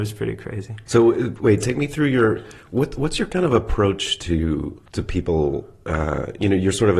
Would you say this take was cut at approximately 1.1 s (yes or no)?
no